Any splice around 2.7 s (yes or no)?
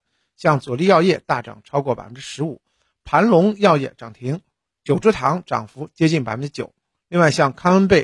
no